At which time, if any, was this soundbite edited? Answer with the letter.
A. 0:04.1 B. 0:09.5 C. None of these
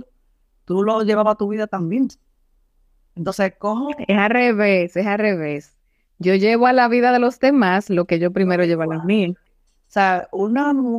B